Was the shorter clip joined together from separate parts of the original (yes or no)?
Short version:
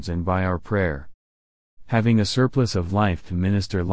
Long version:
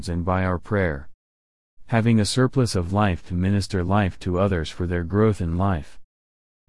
no